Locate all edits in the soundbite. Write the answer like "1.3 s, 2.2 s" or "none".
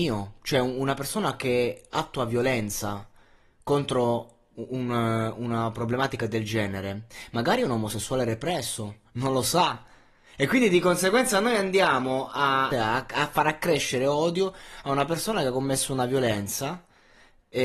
9.0 s, 12.7 s

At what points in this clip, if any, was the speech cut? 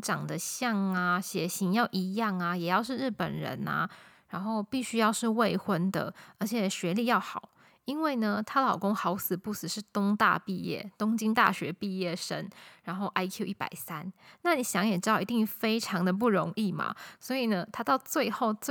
17.2 s

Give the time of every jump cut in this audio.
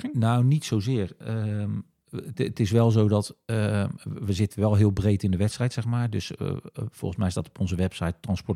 none

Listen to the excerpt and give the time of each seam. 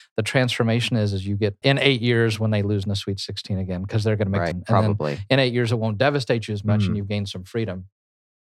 1.6 s, 4.5 s

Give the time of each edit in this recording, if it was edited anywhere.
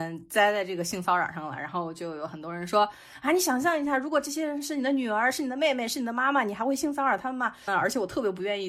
7.7 s

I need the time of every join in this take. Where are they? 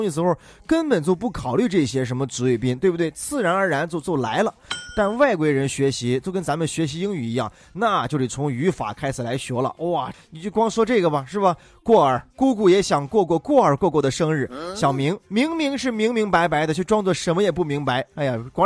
10.1 s

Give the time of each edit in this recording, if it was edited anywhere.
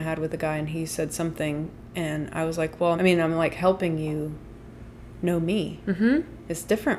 3.0 s

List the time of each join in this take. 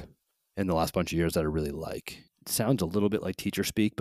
2.3 s

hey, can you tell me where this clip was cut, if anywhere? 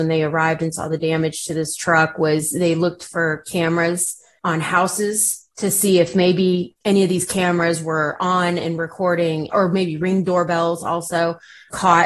none

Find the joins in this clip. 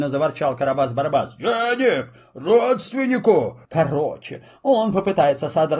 3.6 s

